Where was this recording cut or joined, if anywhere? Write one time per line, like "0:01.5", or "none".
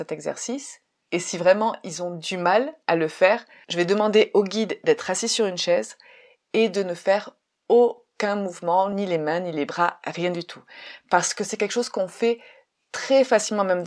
none